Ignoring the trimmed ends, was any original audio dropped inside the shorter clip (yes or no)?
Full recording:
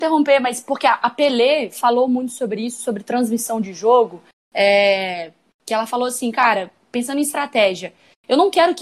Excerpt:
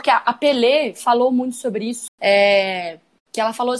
yes